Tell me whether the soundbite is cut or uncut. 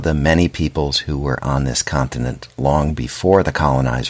uncut